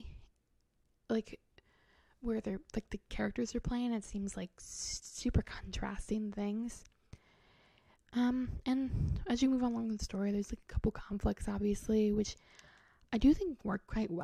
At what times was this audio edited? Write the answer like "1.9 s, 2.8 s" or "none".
none